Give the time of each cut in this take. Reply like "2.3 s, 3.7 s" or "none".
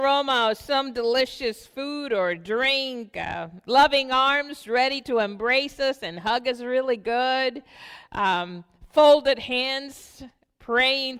none